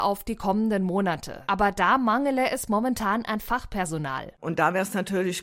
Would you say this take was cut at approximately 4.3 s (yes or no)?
no